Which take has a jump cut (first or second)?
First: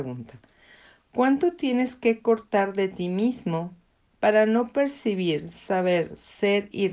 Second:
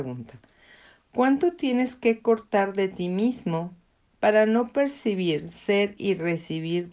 second